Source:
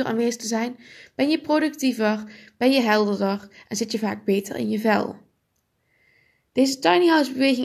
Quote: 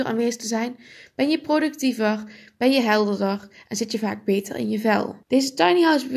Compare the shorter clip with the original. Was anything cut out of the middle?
yes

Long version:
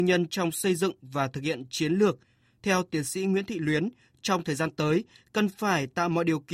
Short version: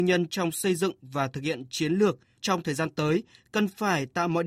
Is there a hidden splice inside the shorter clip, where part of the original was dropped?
yes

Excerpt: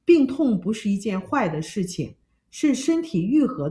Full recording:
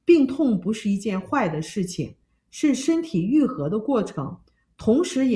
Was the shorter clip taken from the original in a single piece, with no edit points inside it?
yes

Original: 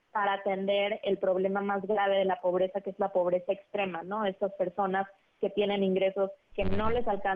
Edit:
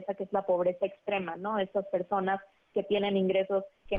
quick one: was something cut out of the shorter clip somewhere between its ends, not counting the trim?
no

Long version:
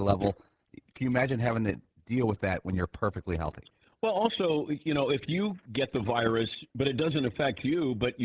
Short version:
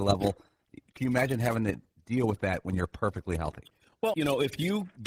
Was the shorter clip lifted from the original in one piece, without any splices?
no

